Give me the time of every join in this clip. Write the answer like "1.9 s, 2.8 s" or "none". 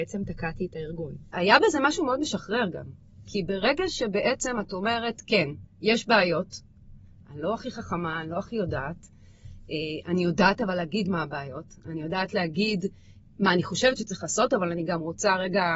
1.3 s